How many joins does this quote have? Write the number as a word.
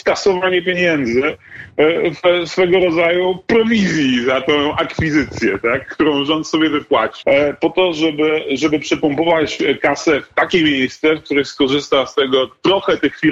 one